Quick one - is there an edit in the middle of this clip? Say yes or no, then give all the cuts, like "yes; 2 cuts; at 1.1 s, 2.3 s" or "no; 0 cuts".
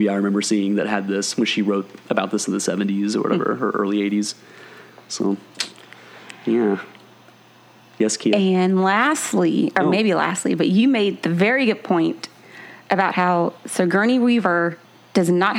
no; 0 cuts